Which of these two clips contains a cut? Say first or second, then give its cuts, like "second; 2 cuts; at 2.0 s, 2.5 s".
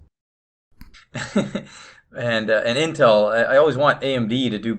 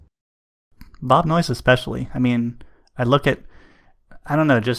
first; 1 cut; at 0.9 s